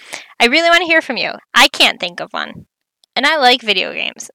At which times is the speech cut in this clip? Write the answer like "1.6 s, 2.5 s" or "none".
1.4 s